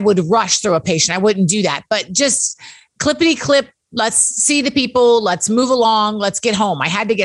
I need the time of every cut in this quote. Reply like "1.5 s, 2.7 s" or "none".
none